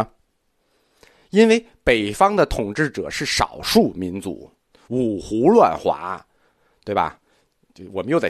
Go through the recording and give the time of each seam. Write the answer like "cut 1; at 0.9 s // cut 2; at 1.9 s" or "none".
none